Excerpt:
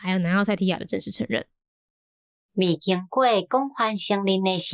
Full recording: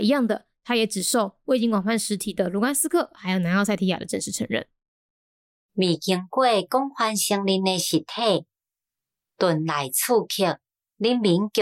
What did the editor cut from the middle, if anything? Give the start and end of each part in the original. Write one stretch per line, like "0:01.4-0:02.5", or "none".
none